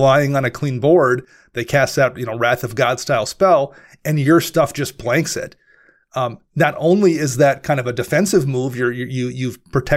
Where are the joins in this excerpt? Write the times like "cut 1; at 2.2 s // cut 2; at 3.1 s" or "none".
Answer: none